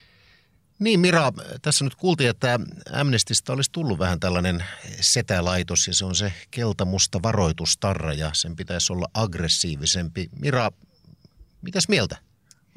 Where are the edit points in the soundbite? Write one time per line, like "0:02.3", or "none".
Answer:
none